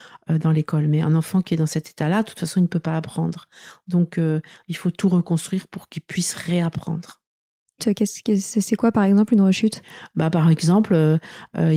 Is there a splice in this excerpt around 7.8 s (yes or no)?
yes